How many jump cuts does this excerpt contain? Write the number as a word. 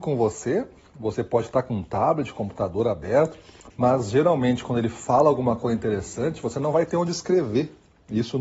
one